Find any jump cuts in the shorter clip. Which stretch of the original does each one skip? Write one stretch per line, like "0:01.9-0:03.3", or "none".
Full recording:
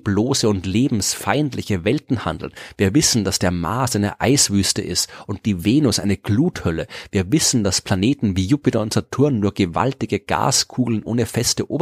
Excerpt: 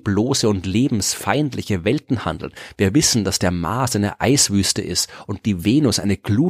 none

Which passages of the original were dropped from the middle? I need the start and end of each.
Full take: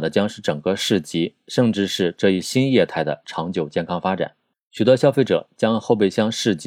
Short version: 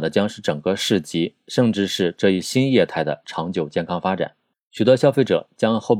none

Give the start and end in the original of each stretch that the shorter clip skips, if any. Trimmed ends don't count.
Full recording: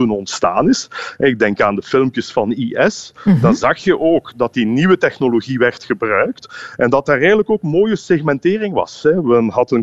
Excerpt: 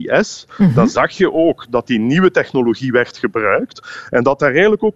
none

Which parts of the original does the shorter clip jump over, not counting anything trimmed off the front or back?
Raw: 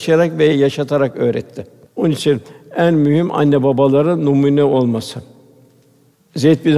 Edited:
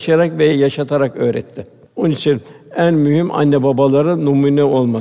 none

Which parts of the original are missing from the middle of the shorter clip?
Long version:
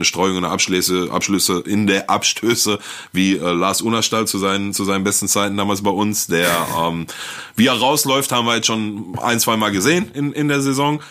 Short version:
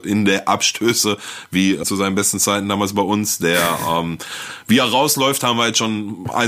0:03.4-0:04.7

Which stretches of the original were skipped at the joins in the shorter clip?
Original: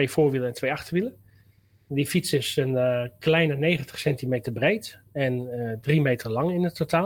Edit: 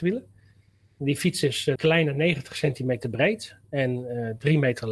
0:02.6-0:03.2

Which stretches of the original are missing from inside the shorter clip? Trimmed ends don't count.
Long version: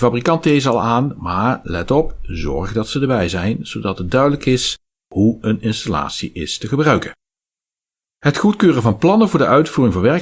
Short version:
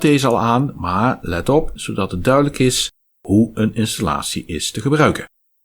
0:02.2-0:03.6

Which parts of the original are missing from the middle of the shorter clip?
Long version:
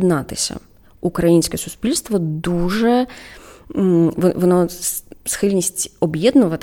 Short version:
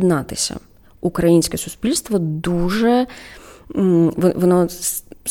none

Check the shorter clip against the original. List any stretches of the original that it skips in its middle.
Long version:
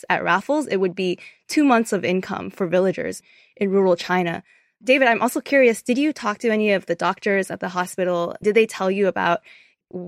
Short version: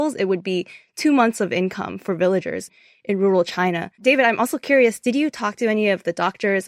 0:04.5-0:04.8

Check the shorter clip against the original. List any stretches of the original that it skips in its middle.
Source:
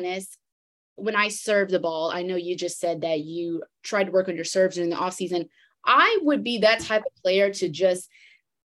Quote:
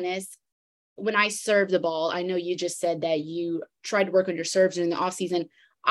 none

